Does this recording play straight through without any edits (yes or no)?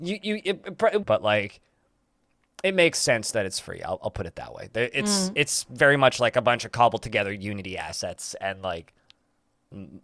no